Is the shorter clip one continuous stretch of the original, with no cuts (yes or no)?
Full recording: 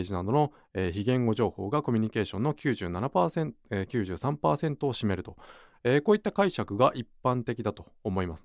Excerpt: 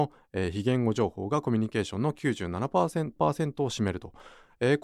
no